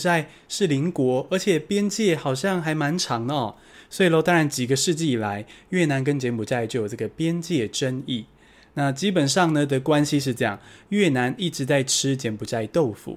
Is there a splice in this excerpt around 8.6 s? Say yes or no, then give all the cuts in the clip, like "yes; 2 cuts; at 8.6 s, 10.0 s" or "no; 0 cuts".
no; 1 cut; at 3.7 s